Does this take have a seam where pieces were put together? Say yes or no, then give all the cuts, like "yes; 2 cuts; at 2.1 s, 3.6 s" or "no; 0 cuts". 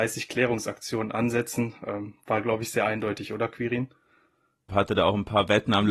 yes; 1 cut; at 4.7 s